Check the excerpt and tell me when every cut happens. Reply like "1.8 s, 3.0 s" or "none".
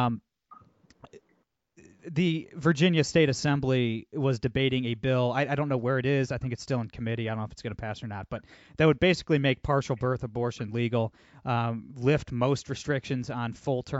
none